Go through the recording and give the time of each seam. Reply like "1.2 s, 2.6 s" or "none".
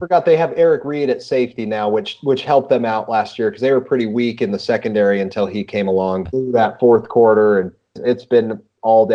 6.3 s, 8.0 s